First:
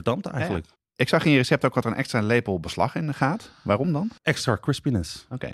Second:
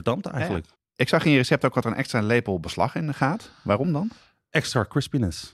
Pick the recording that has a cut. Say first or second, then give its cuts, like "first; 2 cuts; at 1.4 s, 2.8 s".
first; 1 cut; at 4.2 s